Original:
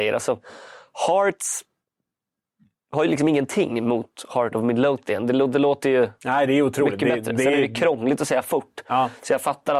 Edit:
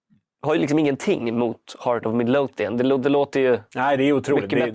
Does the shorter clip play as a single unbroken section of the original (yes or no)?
yes